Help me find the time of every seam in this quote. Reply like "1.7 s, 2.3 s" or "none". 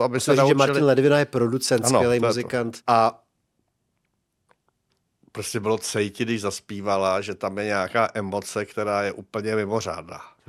2.8 s